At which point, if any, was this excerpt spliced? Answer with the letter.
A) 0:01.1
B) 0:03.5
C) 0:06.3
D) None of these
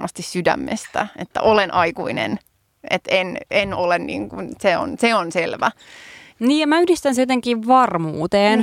C